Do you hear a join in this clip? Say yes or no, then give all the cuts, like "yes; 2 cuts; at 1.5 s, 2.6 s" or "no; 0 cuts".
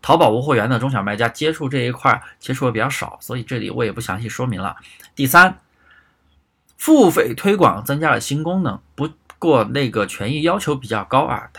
yes; 1 cut; at 5.1 s